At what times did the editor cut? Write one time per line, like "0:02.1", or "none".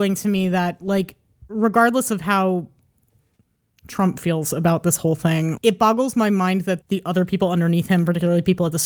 0:05.6
0:06.8